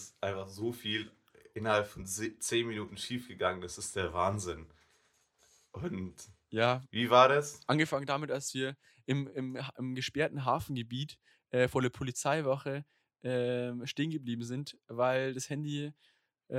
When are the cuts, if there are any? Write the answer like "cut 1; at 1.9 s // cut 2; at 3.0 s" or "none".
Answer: none

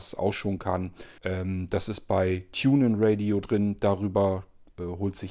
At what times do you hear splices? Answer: cut 1; at 1.2 s

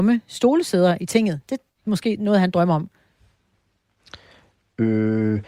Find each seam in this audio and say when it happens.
none

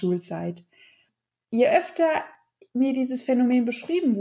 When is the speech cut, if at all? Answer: none

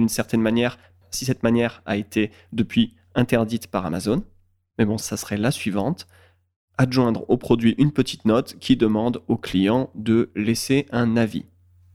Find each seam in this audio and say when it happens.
cut 1; at 5.0 s

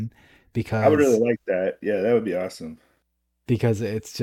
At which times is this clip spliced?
none

